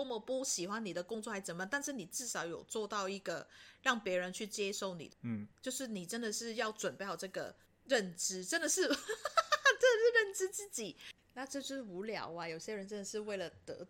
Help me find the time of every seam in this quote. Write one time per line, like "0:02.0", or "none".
0:05.5
0:11.2